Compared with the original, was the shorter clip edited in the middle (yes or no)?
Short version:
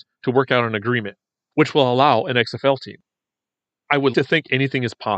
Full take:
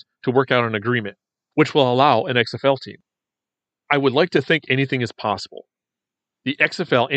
yes